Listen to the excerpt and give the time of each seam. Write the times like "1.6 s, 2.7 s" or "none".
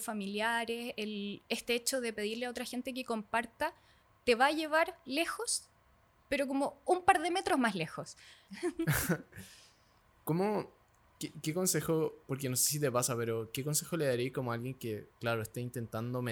8.5 s